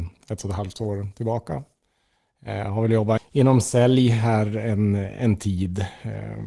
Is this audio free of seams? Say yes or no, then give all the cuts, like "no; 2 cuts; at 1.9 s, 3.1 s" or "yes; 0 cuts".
no; 1 cut; at 3.2 s